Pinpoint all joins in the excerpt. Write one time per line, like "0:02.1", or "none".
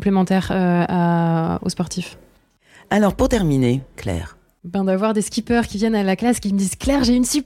0:01.6
0:03.9

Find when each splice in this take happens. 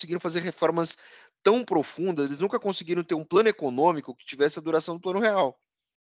none

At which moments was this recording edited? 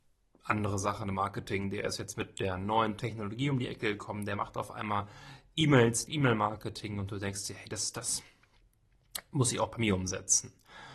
0:06.1

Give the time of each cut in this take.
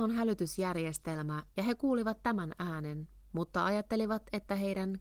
0:01.5

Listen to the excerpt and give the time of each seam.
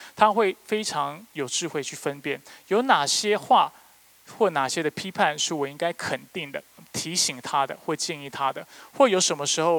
0:06.8

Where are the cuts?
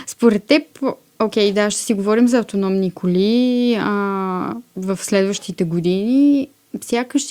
none

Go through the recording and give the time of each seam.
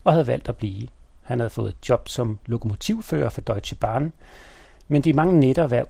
0:01.2

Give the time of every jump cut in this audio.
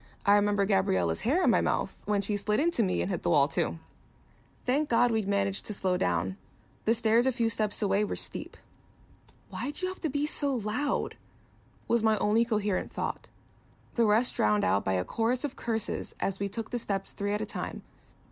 none

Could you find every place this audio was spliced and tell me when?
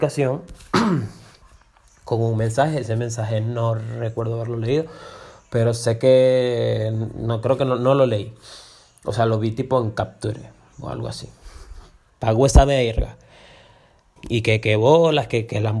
0:12.1
0:14.2

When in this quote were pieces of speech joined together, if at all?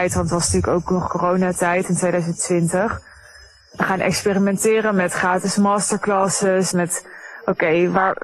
0:06.7

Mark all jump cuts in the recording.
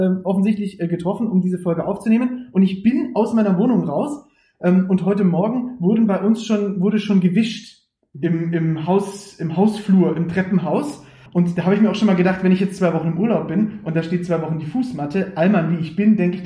0:11.3

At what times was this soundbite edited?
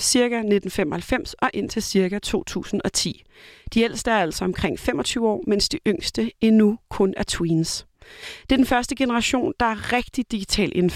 none

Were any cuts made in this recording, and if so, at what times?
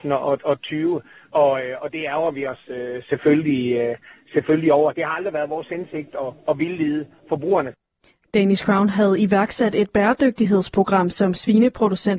none

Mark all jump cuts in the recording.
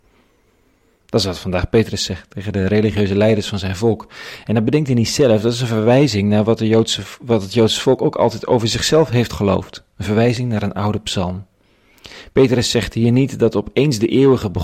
none

